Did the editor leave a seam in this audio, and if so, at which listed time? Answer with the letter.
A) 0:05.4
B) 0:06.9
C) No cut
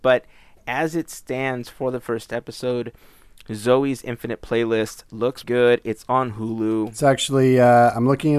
A